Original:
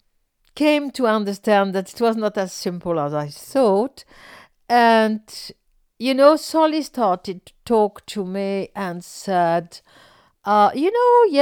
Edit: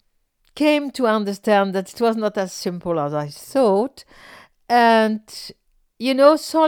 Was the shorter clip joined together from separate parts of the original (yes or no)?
no